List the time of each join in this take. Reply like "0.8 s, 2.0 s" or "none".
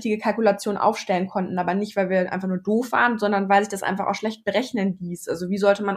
none